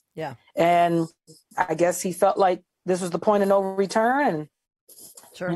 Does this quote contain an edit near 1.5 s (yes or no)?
yes